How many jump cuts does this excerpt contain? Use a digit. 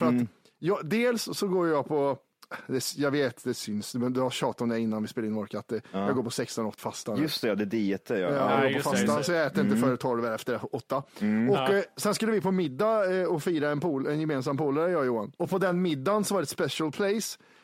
2